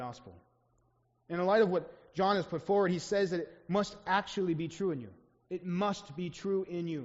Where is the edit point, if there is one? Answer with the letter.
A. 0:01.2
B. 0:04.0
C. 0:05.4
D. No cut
D